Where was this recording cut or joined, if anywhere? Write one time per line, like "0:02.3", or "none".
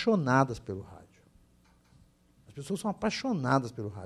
none